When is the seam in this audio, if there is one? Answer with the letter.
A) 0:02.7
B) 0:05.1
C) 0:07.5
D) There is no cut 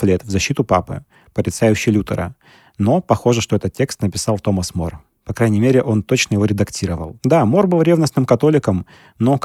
D